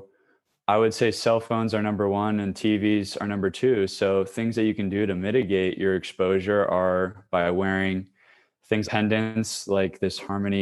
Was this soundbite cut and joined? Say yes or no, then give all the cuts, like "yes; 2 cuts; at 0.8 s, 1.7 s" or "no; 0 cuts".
yes; 1 cut; at 8.8 s